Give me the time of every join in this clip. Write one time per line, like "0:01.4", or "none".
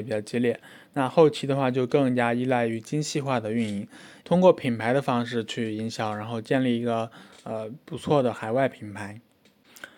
0:04.2